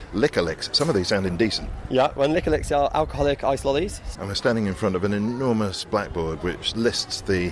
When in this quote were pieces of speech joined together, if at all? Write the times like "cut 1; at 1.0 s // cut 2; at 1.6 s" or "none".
cut 1; at 4.1 s